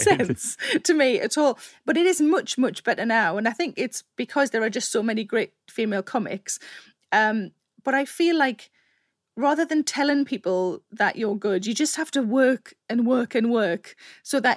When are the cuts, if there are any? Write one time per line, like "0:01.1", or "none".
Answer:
none